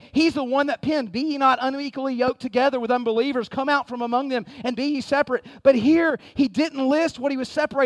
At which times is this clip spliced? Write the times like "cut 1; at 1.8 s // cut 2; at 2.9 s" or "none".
none